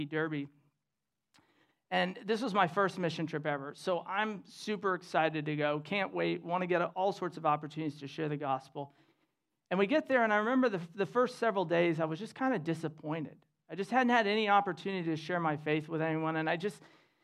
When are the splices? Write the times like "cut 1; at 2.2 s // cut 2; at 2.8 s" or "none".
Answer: none